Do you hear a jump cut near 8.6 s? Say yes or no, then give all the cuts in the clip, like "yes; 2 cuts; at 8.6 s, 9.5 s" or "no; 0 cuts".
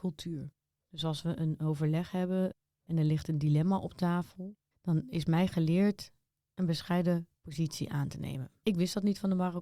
no; 1 cut; at 4.7 s